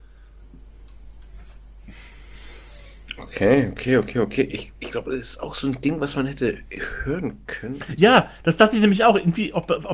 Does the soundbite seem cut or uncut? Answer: uncut